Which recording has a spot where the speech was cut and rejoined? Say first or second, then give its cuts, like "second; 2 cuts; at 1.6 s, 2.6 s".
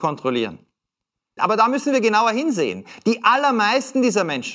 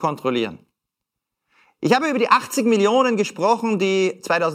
first; 1 cut; at 1.4 s